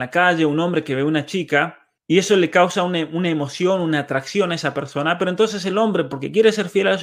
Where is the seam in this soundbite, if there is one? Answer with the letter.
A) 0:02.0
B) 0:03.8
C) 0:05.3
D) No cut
A